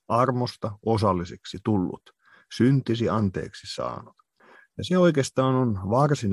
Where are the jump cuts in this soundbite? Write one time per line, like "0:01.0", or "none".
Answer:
none